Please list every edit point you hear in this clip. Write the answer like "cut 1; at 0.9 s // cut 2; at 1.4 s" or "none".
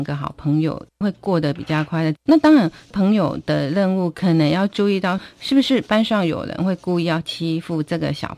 cut 1; at 2.1 s